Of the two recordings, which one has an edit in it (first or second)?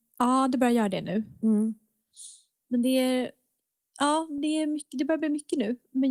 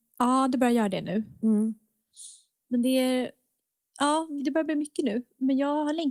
second